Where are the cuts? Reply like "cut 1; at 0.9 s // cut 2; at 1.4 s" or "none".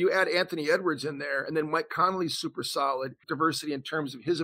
cut 1; at 3.2 s